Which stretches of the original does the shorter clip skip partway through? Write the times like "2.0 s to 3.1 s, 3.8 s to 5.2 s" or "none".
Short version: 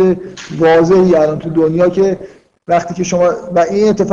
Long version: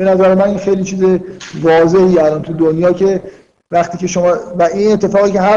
none